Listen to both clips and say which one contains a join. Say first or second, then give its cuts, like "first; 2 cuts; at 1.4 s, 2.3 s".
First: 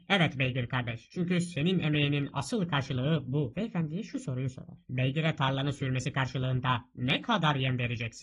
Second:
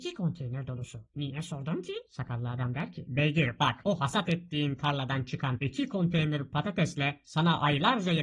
first; 1 cut; at 3.5 s